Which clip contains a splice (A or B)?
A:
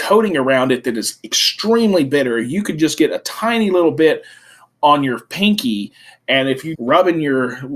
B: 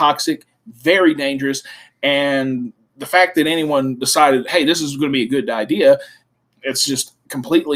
A